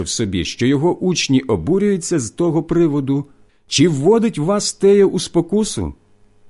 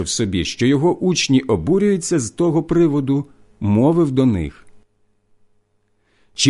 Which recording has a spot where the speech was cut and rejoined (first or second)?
first